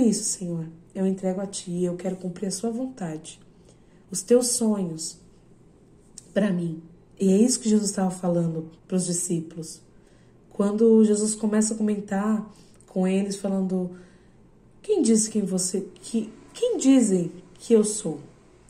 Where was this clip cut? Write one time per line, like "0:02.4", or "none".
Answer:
0:07.1
0:08.8